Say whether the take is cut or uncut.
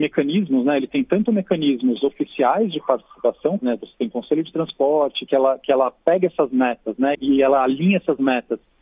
cut